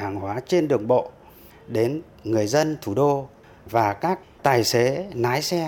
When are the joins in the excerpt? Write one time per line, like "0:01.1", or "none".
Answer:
none